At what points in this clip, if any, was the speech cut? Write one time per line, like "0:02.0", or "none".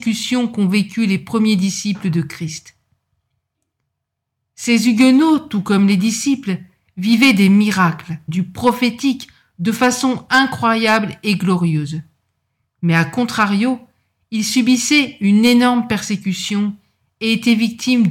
0:08.3